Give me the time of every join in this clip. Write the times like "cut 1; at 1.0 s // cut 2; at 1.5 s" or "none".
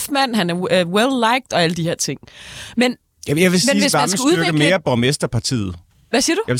none